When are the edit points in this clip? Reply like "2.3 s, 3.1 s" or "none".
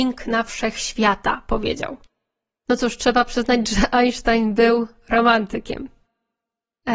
none